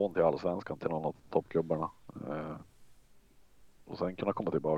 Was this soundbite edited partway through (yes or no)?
no